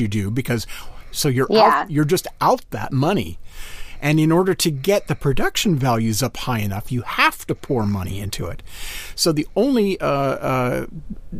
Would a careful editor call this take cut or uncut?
cut